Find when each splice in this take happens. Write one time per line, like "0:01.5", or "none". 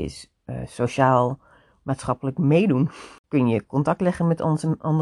none

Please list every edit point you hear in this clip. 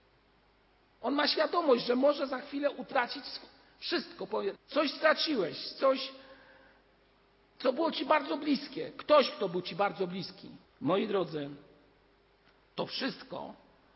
0:04.5
0:10.6

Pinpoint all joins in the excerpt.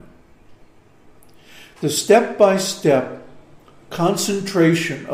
none

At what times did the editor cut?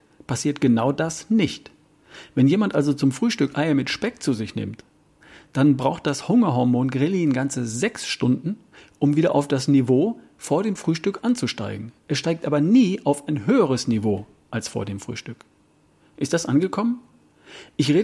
none

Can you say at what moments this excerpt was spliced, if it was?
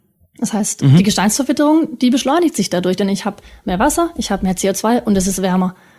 none

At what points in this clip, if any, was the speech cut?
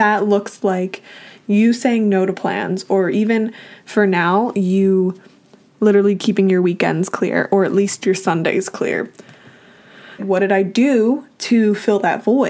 0:10.2

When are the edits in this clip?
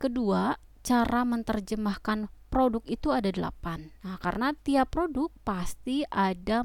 0:04.0

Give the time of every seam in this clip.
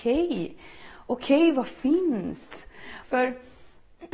0:03.0

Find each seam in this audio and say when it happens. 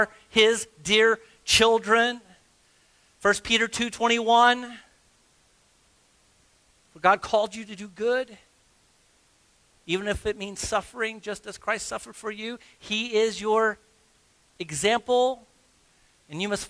none

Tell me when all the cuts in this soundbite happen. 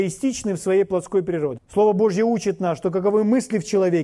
0:01.6

